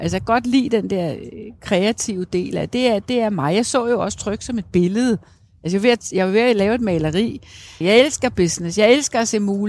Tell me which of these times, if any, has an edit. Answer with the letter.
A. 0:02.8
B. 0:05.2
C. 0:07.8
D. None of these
C